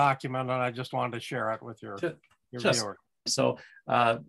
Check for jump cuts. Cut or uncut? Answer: cut